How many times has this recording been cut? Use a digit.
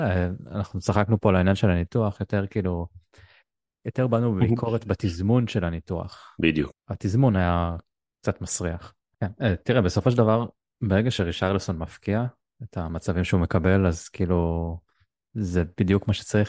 2